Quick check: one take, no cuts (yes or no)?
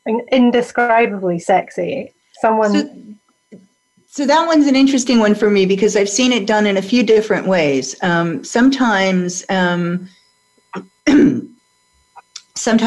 yes